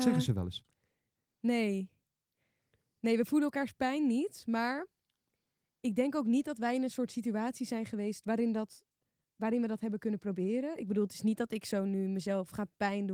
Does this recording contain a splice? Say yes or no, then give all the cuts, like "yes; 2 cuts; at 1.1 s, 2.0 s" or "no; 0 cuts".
no; 0 cuts